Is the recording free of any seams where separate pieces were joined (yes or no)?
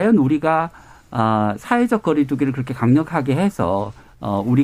yes